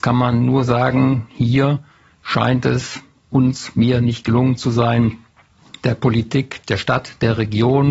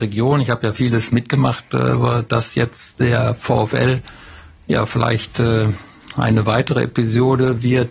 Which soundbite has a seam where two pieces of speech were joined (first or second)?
first